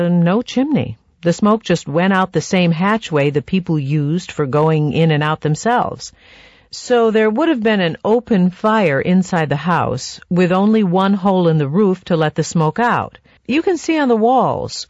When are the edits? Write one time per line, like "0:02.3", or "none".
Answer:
0:13.4